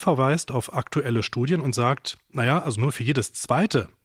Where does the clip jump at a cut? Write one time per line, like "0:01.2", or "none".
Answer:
none